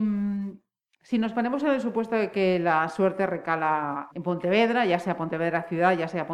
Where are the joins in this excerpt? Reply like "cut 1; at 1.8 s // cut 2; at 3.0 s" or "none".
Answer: cut 1; at 4.1 s